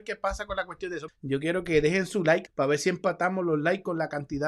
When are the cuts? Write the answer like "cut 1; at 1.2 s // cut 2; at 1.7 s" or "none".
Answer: cut 1; at 1.1 s // cut 2; at 2.5 s